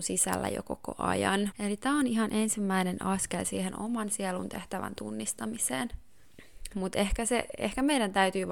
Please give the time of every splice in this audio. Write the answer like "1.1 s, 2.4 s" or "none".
1.5 s, 6.7 s